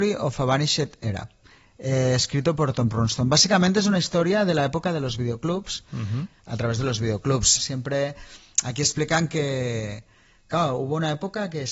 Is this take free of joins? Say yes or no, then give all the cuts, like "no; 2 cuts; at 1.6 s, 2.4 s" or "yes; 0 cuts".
no; 2 cuts; at 6.3 s, 7.6 s